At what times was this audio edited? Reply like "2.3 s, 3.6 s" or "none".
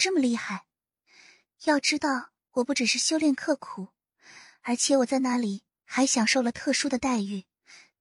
none